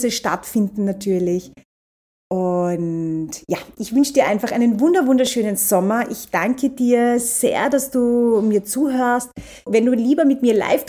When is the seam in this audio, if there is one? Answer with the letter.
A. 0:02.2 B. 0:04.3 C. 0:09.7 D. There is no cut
C